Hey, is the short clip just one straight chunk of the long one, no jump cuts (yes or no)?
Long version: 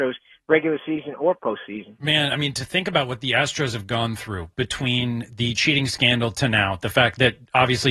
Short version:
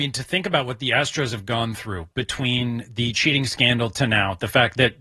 yes